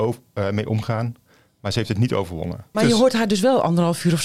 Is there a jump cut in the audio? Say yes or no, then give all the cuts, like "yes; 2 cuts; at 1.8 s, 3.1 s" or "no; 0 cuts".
yes; 1 cut; at 2.7 s